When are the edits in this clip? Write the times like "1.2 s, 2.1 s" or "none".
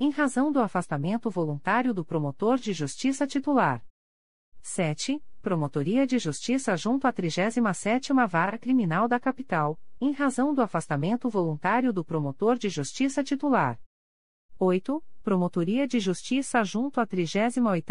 none